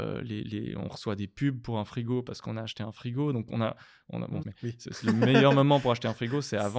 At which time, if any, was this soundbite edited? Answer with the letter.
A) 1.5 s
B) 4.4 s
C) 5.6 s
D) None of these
B